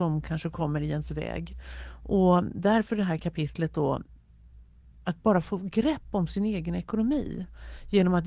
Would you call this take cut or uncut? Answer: uncut